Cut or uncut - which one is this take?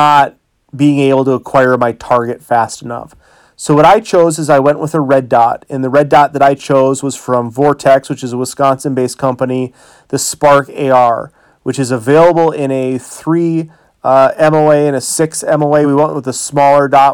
uncut